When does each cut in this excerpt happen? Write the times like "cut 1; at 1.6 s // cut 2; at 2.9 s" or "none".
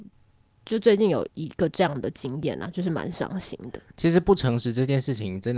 cut 1; at 1.3 s